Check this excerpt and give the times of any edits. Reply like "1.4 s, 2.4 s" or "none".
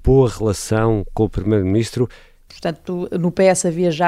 2.5 s